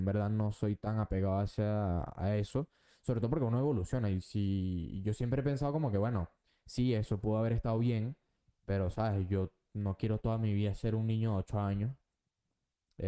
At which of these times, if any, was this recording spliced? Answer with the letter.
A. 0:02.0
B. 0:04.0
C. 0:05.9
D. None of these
D